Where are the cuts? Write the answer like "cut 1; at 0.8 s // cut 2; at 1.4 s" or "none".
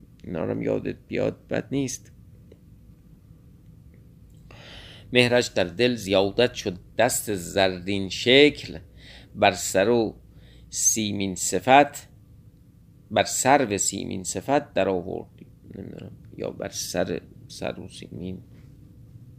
none